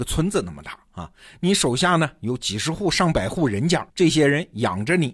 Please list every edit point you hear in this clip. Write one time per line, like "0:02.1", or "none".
0:03.9